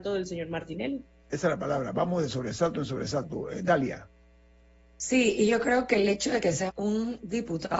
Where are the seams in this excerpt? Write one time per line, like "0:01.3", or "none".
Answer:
0:06.7